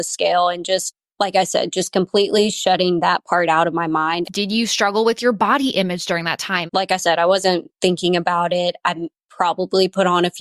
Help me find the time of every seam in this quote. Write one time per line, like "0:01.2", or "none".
0:04.2
0:06.7